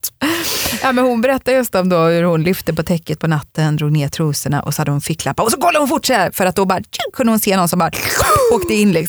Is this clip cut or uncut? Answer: uncut